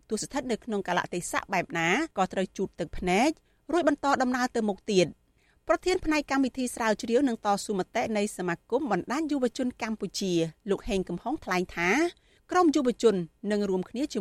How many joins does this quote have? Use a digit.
1